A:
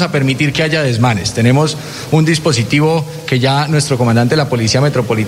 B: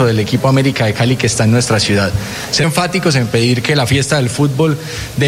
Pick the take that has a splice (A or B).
B